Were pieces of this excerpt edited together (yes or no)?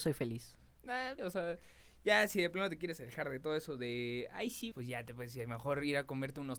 yes